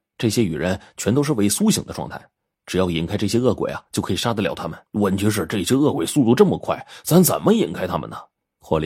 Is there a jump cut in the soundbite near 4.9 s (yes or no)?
yes